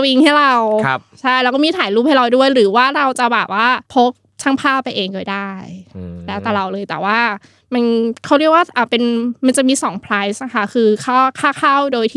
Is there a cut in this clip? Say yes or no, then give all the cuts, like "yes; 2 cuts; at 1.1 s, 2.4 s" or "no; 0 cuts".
yes; 1 cut; at 3.8 s